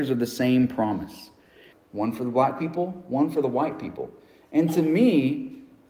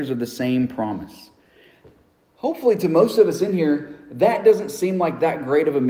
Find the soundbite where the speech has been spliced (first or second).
first